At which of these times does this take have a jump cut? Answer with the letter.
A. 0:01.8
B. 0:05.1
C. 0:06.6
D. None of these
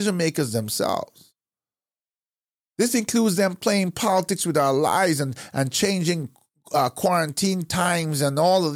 D